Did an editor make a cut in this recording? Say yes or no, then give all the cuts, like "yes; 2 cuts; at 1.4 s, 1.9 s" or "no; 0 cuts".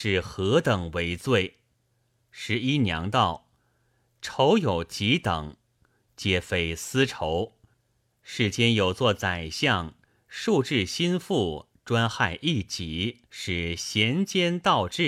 yes; 2 cuts; at 8.1 s, 13.3 s